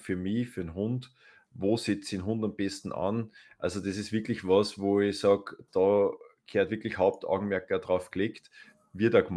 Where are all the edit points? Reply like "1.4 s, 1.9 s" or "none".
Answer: none

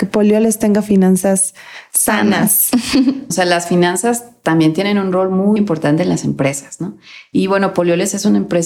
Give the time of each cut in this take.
3.3 s, 5.6 s

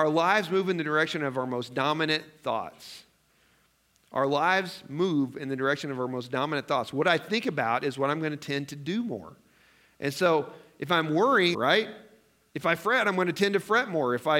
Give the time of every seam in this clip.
11.5 s

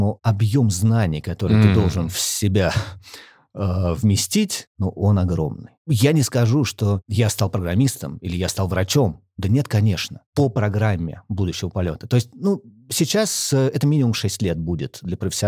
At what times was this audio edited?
10.3 s

